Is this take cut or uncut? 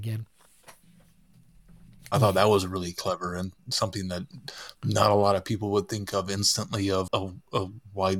cut